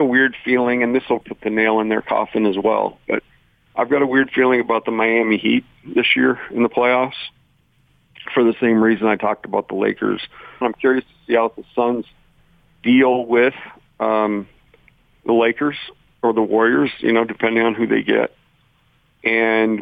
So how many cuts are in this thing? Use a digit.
2